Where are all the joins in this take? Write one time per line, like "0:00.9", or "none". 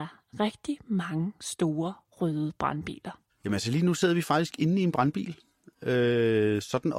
none